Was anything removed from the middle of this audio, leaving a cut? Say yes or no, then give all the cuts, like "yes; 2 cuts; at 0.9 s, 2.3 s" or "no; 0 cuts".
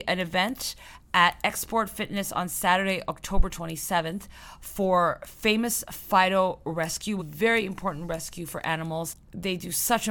yes; 1 cut; at 7.2 s